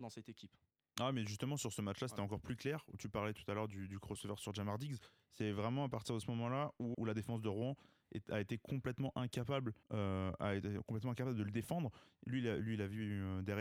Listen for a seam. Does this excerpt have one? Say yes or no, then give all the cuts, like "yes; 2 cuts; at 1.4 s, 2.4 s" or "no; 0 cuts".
yes; 2 cuts; at 6.9 s, 9.8 s